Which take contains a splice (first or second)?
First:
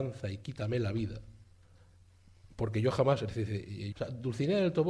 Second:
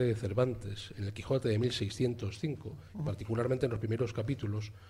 first